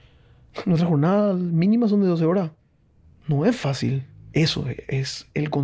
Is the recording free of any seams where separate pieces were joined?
no; 1 cut; at 4.3 s

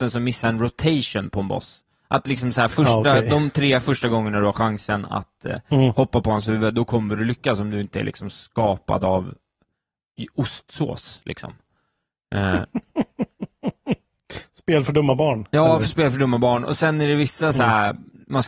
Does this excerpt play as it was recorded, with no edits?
yes; 0 cuts

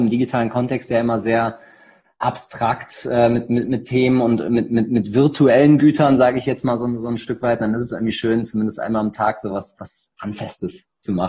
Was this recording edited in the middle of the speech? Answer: no; 0 cuts

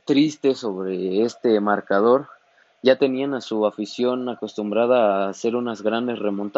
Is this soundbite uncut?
yes; 0 cuts

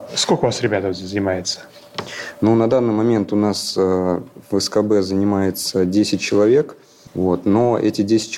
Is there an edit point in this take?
yes; 1 cut; at 7.1 s

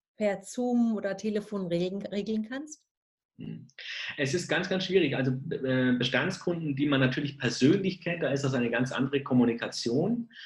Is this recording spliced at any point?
no; 0 cuts

